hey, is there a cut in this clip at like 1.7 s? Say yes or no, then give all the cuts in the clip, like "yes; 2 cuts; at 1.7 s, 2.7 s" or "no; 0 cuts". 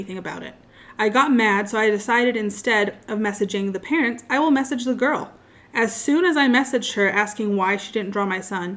no; 0 cuts